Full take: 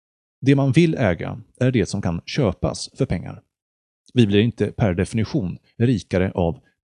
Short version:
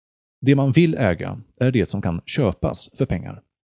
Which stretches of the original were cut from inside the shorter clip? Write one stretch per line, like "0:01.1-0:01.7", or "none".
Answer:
none